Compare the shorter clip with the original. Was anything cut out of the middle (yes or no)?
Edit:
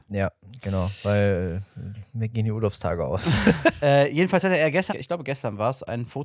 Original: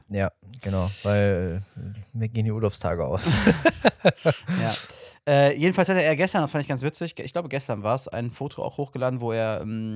yes